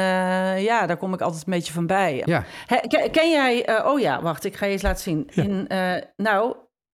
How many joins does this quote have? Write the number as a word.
one